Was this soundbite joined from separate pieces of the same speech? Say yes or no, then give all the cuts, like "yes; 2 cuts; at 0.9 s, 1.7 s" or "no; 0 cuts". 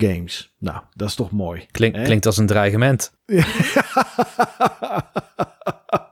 no; 0 cuts